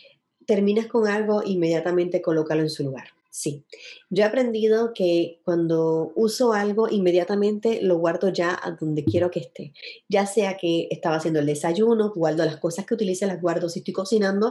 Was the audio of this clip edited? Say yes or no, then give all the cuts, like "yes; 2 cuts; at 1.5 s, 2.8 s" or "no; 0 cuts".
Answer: yes; 1 cut; at 12.1 s